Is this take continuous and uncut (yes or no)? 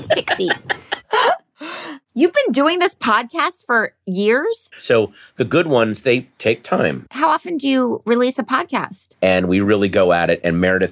no